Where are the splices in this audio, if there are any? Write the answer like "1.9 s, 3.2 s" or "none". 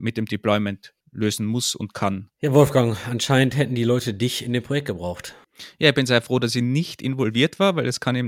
2.3 s